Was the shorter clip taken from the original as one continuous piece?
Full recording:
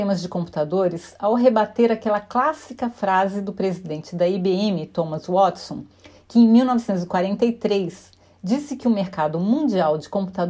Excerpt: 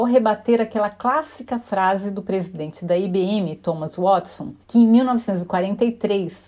no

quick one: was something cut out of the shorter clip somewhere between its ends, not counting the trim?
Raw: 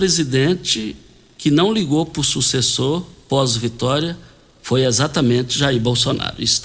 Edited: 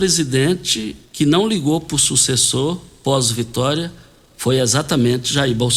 yes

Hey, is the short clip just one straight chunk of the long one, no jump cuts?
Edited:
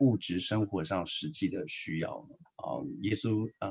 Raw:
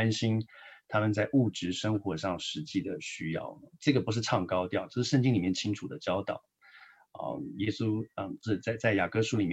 no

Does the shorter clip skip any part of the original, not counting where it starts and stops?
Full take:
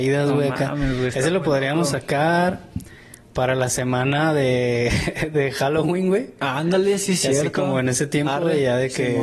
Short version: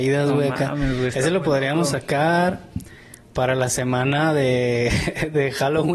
no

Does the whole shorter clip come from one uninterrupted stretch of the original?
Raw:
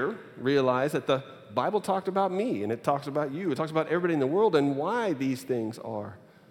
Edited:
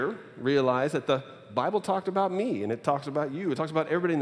yes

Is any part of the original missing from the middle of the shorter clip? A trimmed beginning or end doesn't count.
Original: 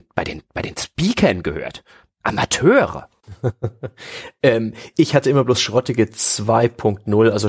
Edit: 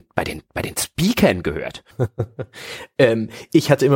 yes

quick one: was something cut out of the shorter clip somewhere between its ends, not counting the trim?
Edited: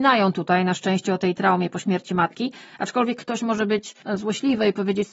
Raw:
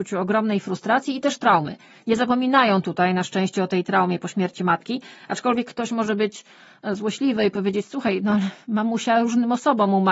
yes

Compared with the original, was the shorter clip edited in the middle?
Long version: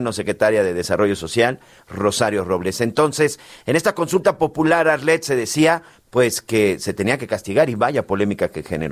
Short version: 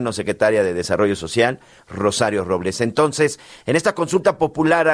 no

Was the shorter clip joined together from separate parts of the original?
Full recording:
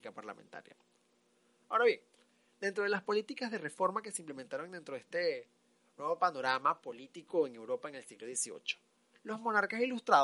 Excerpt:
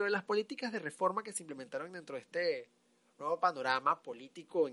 no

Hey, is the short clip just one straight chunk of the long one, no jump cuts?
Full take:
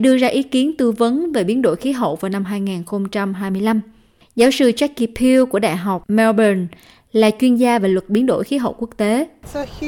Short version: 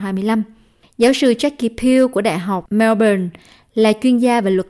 yes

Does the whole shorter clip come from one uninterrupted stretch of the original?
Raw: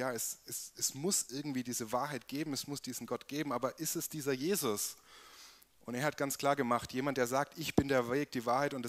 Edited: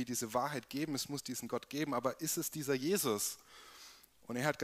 yes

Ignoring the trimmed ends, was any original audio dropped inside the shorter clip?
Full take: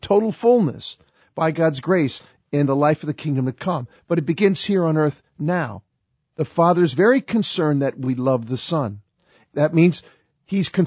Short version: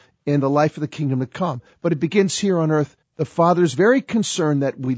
yes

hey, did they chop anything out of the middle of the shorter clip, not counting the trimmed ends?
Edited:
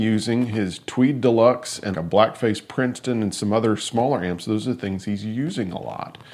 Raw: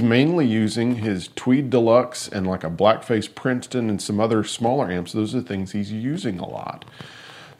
yes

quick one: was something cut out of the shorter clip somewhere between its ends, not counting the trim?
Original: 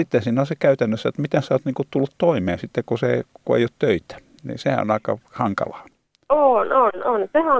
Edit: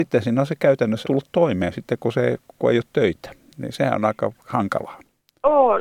yes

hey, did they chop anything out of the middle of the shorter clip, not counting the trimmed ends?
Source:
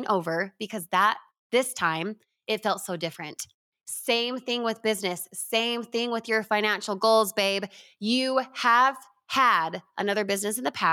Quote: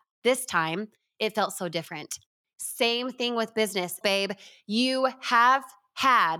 yes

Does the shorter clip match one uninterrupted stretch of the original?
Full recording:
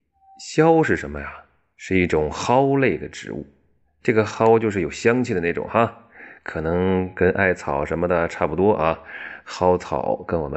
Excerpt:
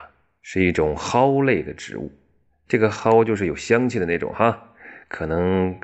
yes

